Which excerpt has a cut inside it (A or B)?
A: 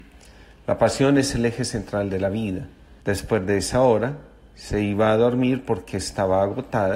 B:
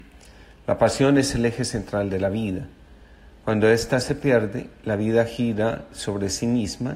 A